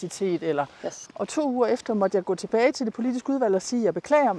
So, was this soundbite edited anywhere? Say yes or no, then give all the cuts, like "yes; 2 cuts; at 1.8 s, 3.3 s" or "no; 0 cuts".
yes; 1 cut; at 1.0 s